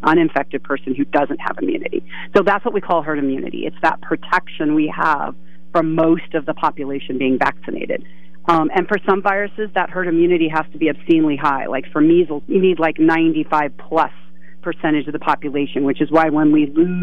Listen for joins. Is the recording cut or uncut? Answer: cut